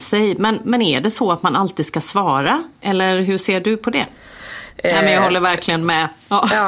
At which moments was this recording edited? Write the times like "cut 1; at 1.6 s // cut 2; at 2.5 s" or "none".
cut 1; at 4.7 s